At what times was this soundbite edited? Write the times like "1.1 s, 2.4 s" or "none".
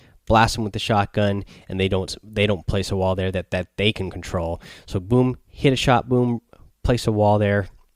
1.6 s